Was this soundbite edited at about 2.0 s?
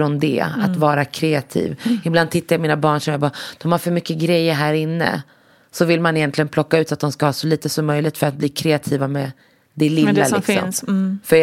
no; 0 cuts

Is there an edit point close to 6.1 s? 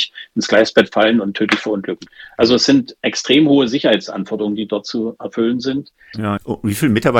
yes; 1 cut; at 6.1 s

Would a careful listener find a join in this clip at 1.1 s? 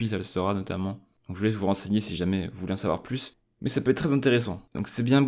no; 0 cuts

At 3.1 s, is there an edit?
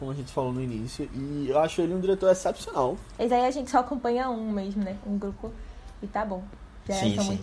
yes; 1 cut; at 3.1 s

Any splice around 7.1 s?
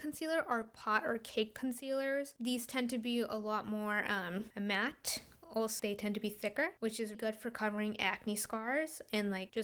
yes; 2 cuts; at 5.8 s, 7.1 s

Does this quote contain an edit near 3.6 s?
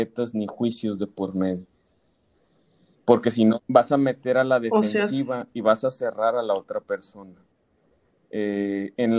yes; 1 cut; at 3.6 s

